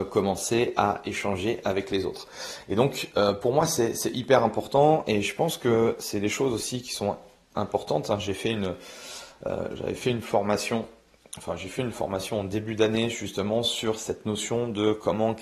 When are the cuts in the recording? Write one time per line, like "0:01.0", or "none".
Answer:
none